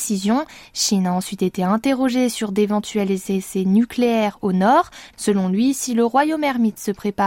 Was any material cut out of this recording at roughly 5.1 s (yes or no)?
yes